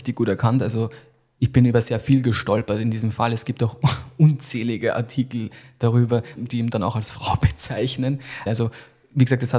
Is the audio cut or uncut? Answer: cut